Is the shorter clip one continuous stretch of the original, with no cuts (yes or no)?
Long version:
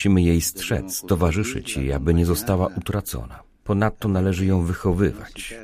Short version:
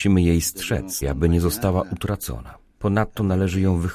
no